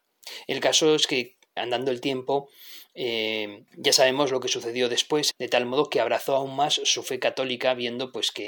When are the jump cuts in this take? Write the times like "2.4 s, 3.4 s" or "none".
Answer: 1.6 s, 3.7 s, 5.3 s